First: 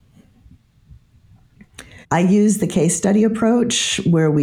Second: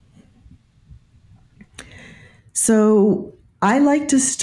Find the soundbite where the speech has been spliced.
first; 1 cut; at 2.0 s

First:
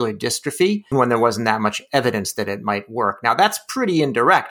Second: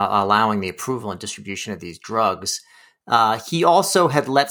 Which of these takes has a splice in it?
first; 1 cut; at 0.9 s

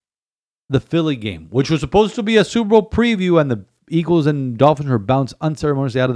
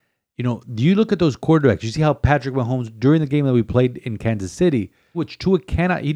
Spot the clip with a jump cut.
second; 1 cut; at 5.1 s

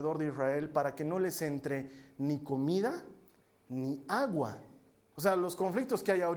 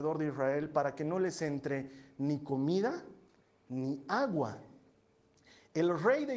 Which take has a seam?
first; 1 cut; at 5.1 s

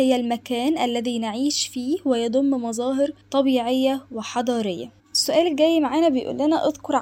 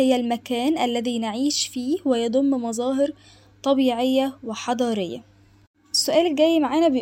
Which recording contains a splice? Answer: first; 2 cuts; at 3.2 s, 5.0 s

